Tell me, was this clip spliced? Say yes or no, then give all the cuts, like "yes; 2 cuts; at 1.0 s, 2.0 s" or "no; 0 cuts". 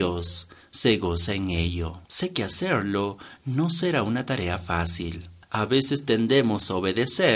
yes; 1 cut; at 2.0 s